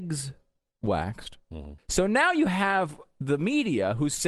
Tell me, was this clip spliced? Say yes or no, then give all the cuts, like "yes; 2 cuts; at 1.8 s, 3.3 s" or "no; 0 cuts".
yes; 1 cut; at 1.8 s